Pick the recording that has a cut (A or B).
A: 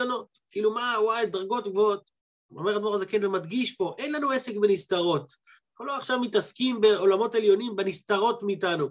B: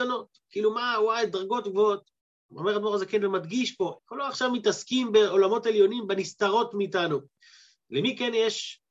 B